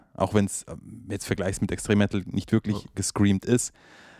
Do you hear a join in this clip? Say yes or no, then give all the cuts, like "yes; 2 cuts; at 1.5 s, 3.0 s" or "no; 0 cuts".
yes; 1 cut; at 2.9 s